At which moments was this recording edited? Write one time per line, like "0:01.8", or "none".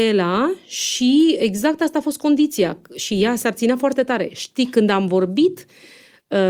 none